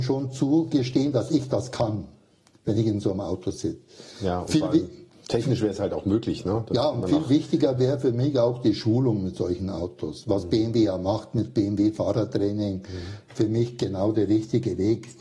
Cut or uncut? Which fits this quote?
uncut